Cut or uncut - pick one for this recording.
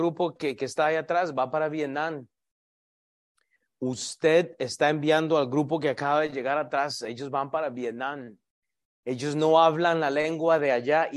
uncut